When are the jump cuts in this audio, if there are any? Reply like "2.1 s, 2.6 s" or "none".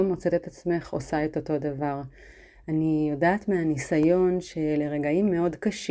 none